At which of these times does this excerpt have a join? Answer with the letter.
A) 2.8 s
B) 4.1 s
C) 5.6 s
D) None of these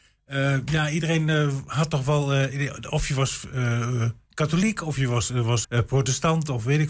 C